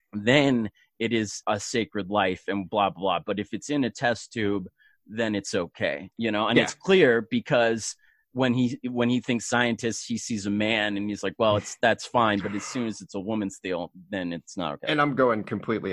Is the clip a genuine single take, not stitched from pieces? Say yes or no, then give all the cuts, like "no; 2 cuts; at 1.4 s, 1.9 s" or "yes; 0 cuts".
yes; 0 cuts